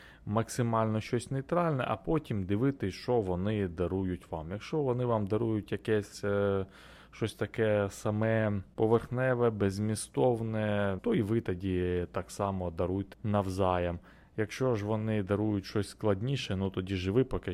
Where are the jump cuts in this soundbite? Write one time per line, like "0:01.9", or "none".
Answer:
0:11.0
0:13.1